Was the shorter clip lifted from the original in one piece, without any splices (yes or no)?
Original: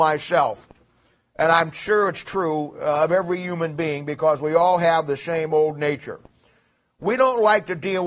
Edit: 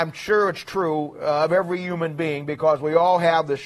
yes